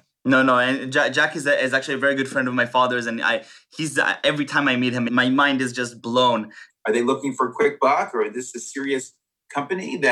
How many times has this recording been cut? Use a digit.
2